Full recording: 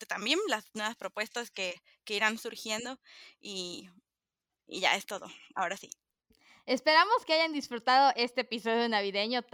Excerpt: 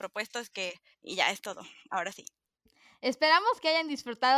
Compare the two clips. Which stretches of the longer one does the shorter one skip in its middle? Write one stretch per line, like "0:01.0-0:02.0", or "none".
0:01.9-0:04.6

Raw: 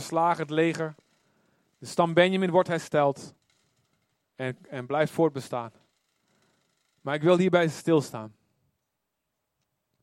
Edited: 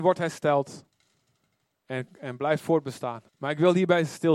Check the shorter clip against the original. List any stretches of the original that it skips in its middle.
0:05.8-0:06.9

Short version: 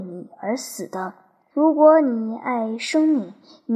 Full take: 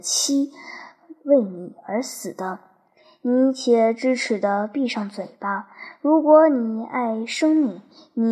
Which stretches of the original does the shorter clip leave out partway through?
0:03.0-0:06.0

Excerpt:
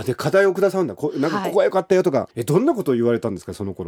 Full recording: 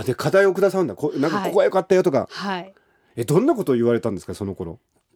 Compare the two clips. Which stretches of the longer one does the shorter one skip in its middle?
0:02.3-0:03.1

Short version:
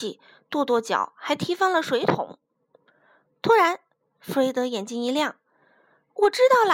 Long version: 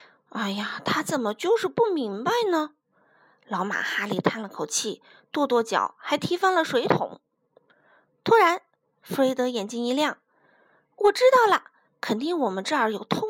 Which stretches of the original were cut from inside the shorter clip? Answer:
none

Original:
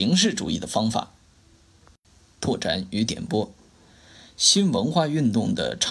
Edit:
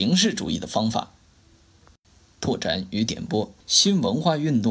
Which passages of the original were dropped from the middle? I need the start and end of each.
0:03.6-0:04.3

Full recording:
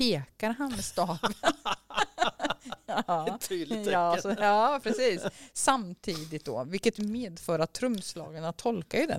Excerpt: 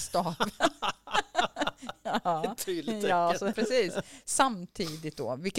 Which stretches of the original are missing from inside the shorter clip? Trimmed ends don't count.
0:04.4-0:04.8

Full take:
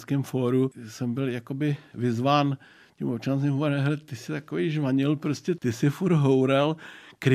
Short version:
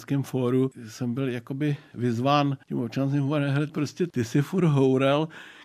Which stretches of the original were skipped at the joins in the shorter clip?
0:02.6-0:02.9
0:04.0-0:05.2

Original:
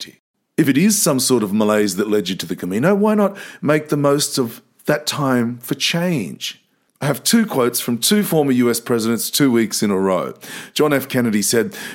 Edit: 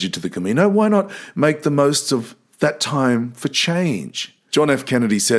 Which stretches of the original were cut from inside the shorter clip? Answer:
0:06.8-0:10.7

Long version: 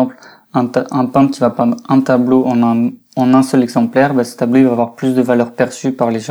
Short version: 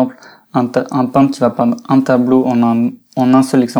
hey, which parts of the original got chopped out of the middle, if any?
none

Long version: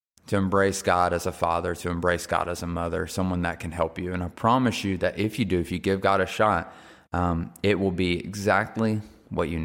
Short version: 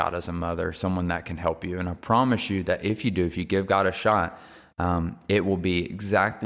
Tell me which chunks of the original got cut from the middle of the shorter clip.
none

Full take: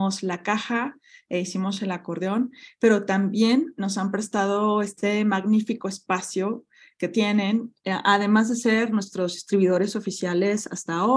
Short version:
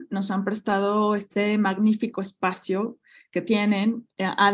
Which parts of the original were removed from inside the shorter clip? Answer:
none

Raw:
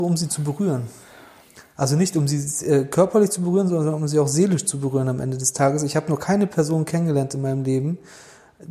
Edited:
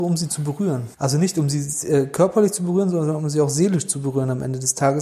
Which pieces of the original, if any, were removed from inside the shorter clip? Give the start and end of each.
0:00.9-0:01.7

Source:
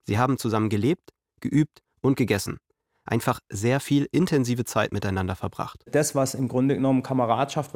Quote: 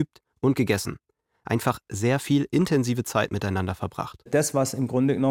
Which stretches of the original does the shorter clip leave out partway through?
none

